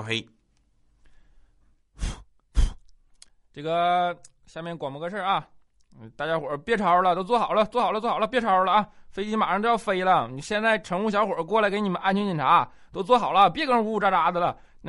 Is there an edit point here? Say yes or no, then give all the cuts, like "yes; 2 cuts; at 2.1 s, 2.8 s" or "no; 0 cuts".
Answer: no; 0 cuts